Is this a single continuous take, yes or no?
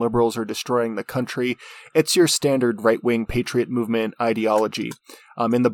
yes